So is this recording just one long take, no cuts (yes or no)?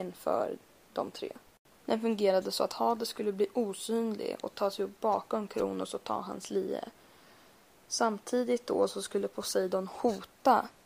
no